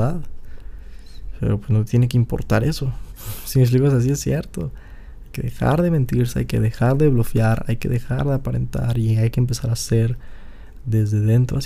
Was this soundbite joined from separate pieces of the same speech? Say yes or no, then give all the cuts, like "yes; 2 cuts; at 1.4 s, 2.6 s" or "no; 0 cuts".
yes; 1 cut; at 3.1 s